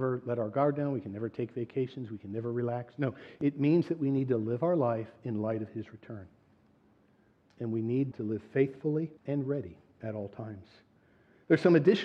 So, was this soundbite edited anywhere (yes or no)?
yes